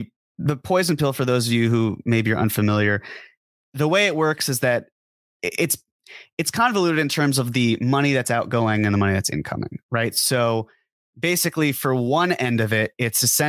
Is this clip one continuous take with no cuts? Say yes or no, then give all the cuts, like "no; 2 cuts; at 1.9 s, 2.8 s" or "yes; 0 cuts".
yes; 0 cuts